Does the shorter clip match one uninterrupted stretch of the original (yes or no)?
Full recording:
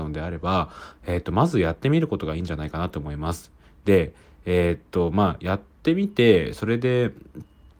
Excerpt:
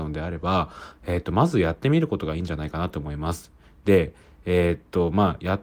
yes